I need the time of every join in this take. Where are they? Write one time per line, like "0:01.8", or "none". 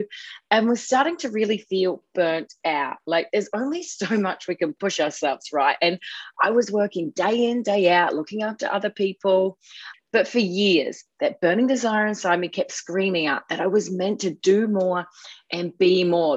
0:09.9